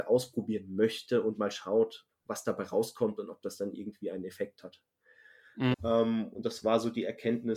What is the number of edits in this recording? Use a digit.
1